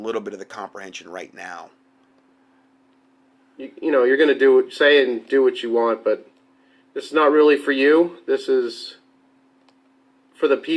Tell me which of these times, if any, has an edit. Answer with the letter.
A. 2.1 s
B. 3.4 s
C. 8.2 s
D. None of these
D